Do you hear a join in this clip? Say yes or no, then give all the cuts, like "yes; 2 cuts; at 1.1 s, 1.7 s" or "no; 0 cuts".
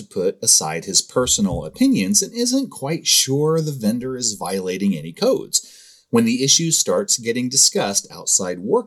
no; 0 cuts